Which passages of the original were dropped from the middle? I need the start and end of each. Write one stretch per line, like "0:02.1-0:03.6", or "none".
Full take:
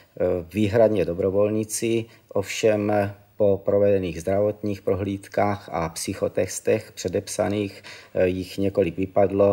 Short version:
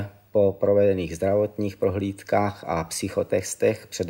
none